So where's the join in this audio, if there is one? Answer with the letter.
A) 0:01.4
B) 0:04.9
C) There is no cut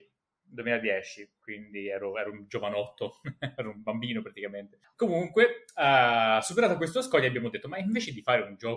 B